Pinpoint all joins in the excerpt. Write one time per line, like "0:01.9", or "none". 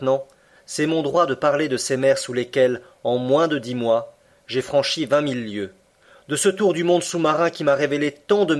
none